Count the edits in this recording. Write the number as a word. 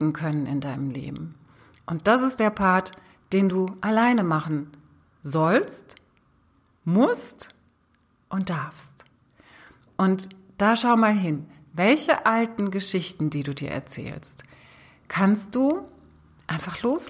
zero